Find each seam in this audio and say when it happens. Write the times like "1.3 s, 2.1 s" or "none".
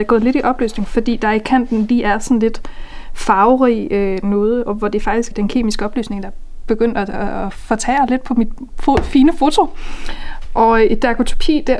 5.3 s

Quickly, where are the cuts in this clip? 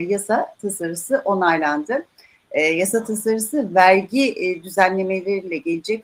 none

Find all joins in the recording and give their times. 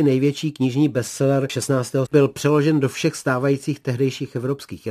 2.1 s

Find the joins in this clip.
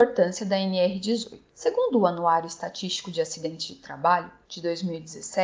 1.5 s, 4.4 s

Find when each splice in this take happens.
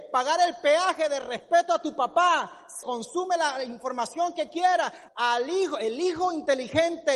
2.8 s, 5.1 s

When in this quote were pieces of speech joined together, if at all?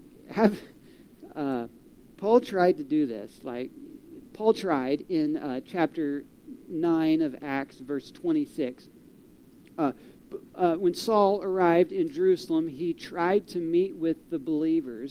10.5 s

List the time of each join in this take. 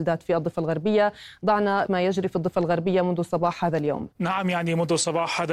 4.1 s

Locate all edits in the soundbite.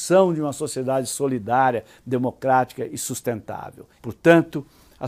4.0 s

